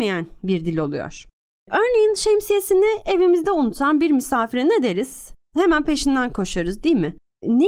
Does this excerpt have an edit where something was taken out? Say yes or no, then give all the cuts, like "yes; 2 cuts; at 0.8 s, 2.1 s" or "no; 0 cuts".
no; 0 cuts